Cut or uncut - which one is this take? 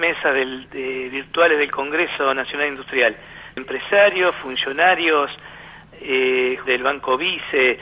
cut